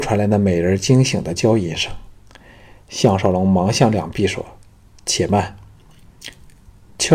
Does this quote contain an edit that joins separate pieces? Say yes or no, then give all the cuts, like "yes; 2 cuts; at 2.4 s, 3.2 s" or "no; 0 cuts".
no; 0 cuts